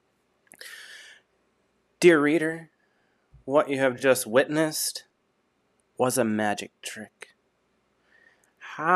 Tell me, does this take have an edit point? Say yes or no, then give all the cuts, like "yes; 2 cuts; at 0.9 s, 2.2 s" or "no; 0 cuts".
no; 0 cuts